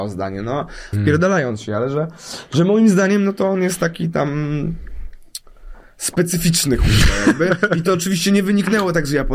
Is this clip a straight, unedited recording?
no; 1 cut; at 0.9 s

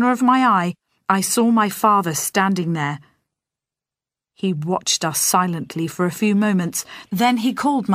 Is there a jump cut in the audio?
no; 0 cuts

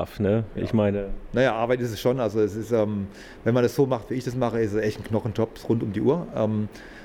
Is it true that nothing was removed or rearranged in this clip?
yes; 0 cuts

